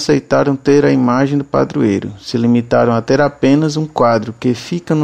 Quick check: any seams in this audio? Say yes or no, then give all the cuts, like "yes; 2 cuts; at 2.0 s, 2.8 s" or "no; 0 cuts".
no; 0 cuts